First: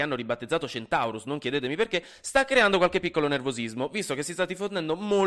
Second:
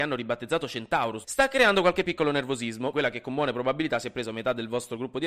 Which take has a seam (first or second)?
second